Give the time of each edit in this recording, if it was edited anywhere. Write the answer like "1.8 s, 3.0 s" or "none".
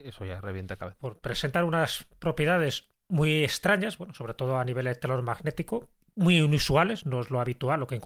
1.0 s